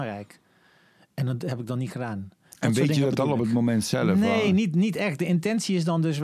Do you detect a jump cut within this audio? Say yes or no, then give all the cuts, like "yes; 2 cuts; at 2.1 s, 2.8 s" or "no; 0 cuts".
no; 0 cuts